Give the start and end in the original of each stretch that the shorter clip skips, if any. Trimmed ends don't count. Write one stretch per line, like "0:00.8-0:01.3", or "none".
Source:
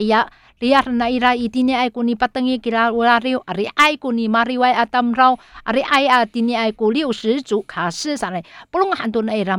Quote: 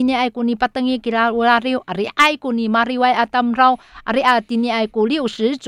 0:05.8-0:06.1